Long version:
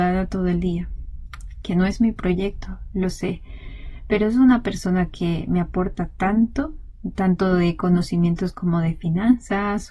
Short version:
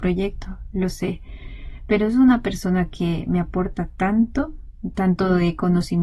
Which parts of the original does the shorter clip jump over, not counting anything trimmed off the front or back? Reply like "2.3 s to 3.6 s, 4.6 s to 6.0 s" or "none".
none